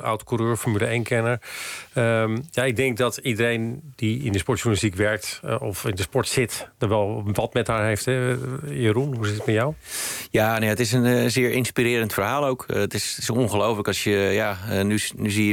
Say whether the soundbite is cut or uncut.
uncut